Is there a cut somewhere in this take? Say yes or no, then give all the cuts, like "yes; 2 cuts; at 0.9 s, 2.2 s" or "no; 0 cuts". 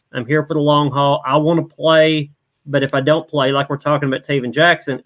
no; 0 cuts